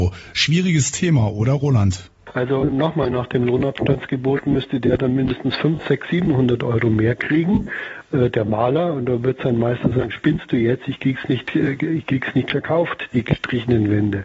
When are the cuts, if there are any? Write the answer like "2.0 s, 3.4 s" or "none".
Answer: none

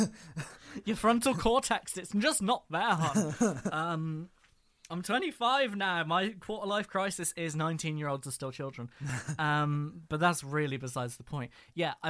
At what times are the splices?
none

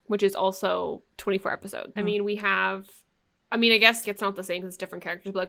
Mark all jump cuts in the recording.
2.0 s, 4.0 s

